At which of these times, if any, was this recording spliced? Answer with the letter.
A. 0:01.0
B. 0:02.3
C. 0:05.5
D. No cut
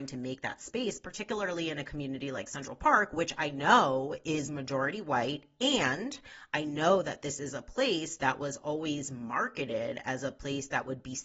D